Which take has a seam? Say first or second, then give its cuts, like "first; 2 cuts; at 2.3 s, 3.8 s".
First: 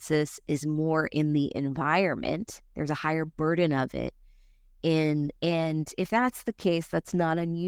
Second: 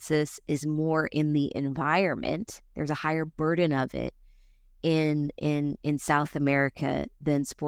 first; 1 cut; at 5.4 s